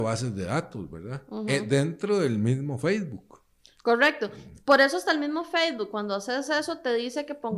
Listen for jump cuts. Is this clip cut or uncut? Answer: uncut